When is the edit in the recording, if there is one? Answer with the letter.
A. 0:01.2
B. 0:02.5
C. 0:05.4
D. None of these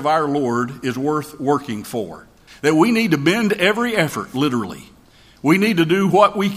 B